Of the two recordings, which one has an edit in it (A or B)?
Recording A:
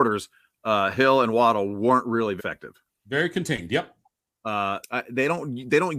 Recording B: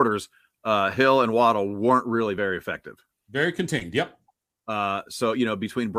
A